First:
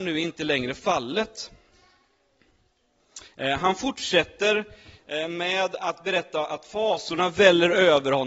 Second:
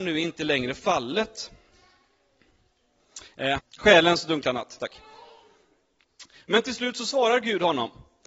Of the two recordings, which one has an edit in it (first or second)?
second